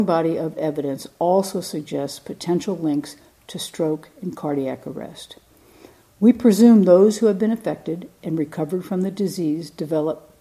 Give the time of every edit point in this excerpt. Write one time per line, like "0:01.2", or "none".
none